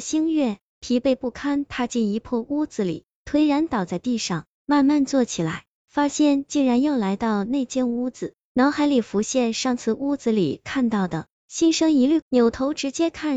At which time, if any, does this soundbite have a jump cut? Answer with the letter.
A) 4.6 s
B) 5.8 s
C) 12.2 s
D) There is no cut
C